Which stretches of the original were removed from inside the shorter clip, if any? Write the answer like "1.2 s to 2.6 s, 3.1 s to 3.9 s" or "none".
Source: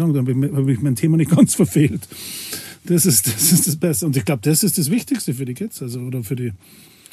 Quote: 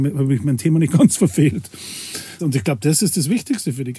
2.8 s to 4.0 s